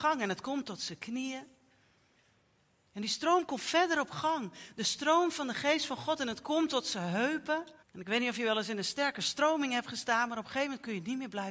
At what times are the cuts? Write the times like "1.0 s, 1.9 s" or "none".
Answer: 7.8 s